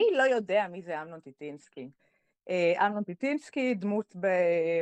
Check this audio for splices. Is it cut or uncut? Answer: uncut